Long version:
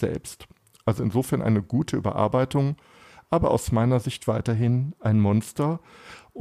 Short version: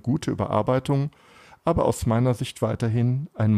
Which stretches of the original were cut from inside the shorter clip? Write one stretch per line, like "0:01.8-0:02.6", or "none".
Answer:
none